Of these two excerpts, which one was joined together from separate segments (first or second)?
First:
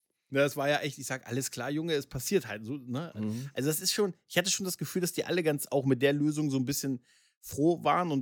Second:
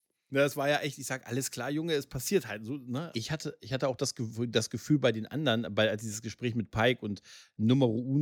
second